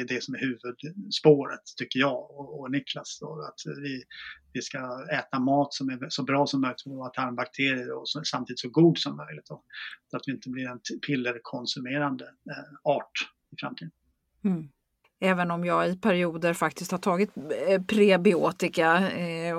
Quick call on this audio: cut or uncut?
cut